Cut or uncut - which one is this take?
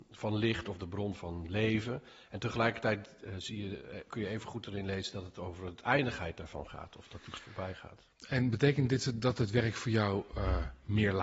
uncut